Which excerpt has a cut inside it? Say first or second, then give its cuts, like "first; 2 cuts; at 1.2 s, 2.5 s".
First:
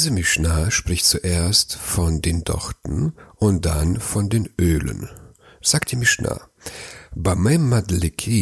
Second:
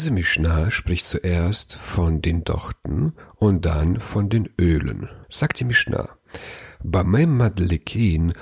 second; 1 cut; at 5.2 s